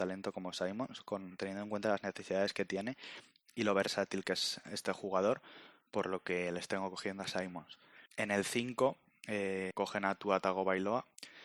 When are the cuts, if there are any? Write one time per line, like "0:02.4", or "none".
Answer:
0:08.1
0:09.7